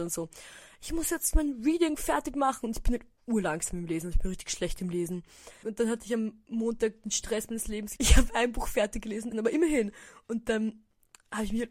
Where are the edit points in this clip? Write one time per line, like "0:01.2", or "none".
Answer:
0:05.6
0:08.0
0:09.3